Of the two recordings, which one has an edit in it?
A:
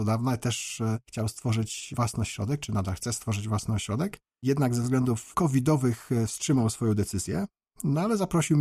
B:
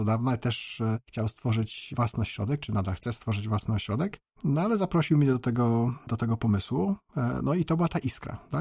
B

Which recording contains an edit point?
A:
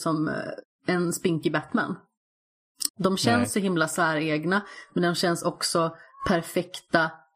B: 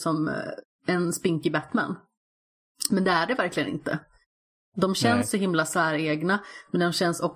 A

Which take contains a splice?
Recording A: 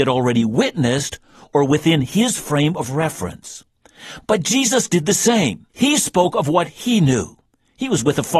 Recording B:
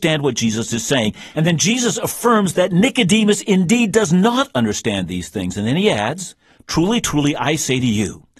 A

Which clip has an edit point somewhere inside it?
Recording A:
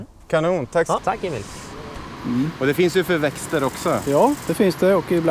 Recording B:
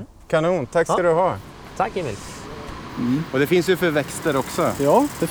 A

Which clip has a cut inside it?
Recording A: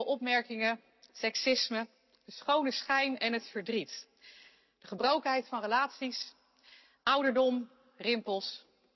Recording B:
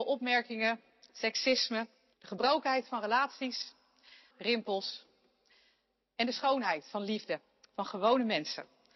B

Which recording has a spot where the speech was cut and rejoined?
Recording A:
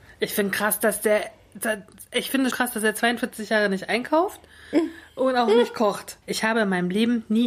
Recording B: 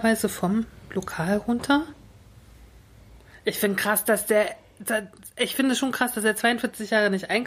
A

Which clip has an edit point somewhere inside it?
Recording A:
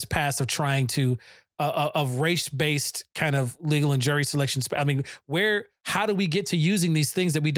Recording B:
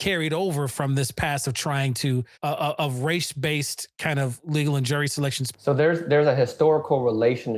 B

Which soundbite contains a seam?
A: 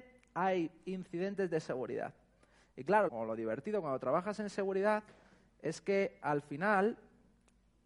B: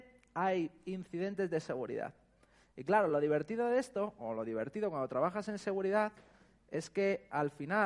A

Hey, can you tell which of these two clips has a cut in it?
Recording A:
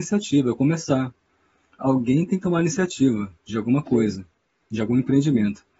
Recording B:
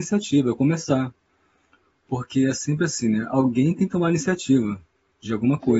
A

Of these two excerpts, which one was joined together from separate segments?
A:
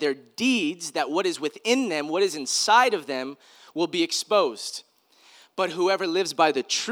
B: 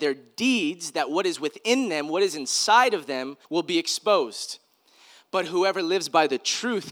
B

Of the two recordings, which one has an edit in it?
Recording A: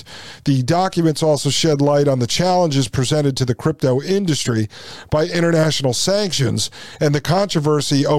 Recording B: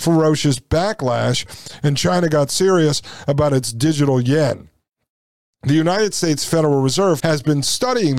B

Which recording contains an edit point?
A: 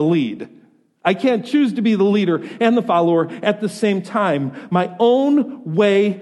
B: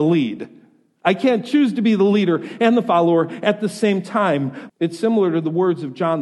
B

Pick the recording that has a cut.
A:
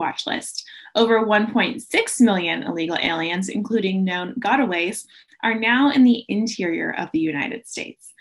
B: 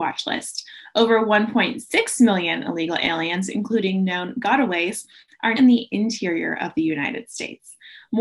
B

